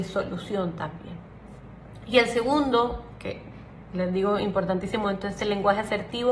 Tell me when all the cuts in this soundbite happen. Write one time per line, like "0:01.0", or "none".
none